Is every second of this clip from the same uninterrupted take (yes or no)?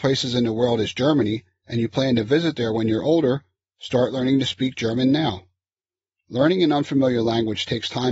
yes